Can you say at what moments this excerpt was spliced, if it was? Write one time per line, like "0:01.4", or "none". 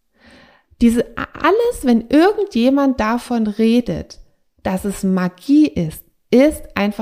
none